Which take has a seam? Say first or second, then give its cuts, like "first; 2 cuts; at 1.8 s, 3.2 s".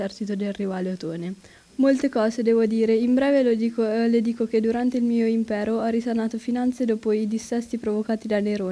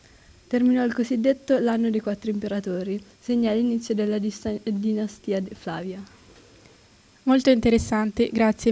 first; 1 cut; at 1.7 s